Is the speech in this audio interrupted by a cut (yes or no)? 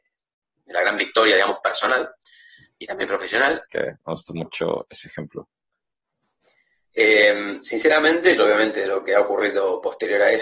yes